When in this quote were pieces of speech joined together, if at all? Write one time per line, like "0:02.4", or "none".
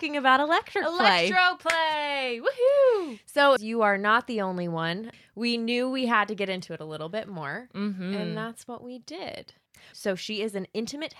0:03.6
0:05.1
0:09.9